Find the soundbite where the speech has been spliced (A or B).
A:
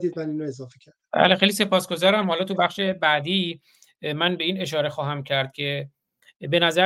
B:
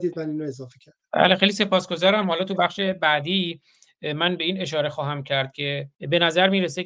B